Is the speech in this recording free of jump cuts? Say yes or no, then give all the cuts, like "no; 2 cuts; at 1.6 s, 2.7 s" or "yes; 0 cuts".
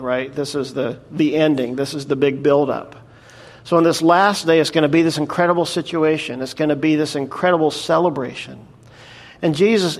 yes; 0 cuts